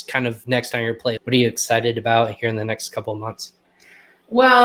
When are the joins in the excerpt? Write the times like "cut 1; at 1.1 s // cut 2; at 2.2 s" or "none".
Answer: cut 1; at 1.2 s